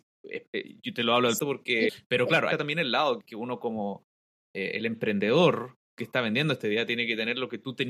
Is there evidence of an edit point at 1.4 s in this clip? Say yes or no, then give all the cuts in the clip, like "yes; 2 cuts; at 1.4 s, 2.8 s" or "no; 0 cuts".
yes; 1 cut; at 1.4 s